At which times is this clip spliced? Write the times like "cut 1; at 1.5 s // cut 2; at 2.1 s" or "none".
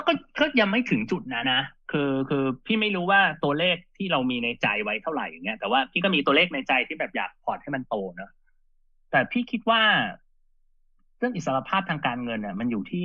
cut 1; at 1.4 s